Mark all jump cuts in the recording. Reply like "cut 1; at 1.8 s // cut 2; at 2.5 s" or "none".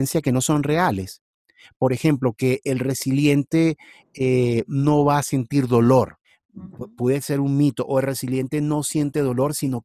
none